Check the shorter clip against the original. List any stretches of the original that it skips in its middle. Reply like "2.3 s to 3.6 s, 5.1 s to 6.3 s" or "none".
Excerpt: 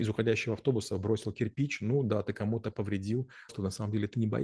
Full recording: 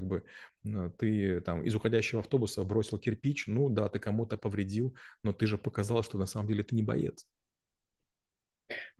5.2 s to 6.0 s